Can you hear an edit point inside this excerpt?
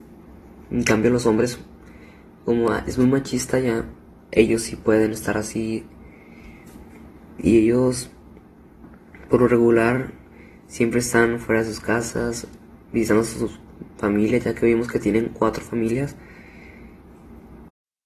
no; 0 cuts

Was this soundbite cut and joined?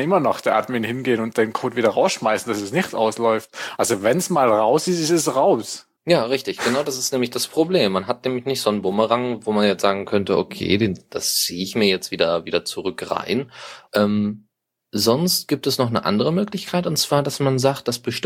yes; 2 cuts; at 6.0 s, 13.9 s

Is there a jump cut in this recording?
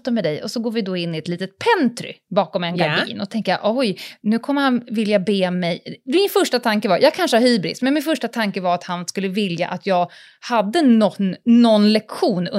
no; 0 cuts

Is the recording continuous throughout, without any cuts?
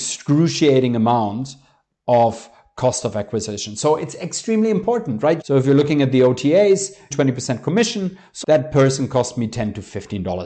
no; 3 cuts; at 5.4 s, 7.1 s, 8.4 s

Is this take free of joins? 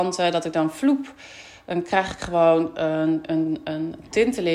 yes; 0 cuts

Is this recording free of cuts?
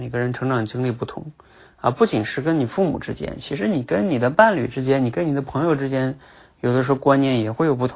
yes; 0 cuts

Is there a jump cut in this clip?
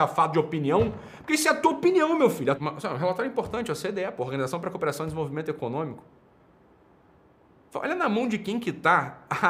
yes; 1 cut; at 2.5 s

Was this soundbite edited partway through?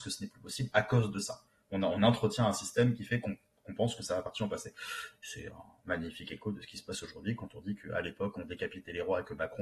no; 0 cuts

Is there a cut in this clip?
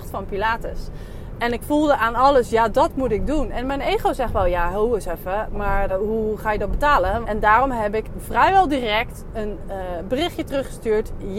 yes; 2 cuts; at 5.9 s, 7.2 s

